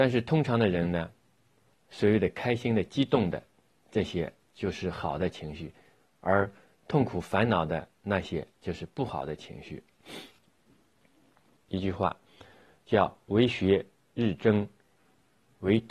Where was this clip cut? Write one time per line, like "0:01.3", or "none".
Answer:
0:01.7
0:11.6